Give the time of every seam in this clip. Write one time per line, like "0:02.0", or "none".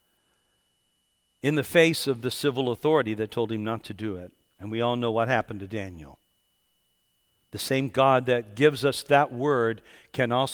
none